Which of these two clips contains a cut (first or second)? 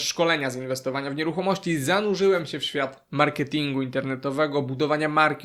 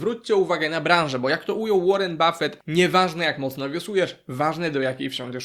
second